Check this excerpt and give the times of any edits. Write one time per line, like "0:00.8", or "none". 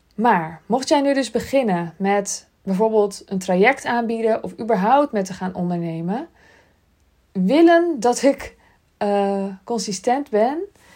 0:07.2